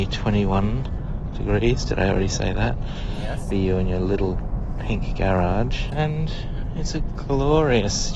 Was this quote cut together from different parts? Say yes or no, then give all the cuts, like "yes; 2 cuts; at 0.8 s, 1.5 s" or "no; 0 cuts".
yes; 2 cuts; at 3.5 s, 5.9 s